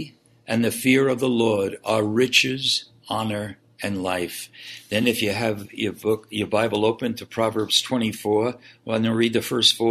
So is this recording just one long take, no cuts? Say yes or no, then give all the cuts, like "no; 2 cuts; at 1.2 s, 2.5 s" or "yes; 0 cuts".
yes; 0 cuts